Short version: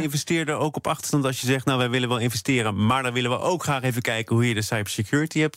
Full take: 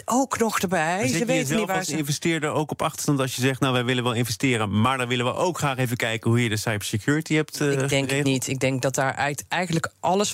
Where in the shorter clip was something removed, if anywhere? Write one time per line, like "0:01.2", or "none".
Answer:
none